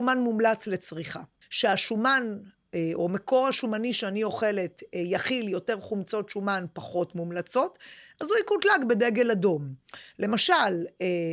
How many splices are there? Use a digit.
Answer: 1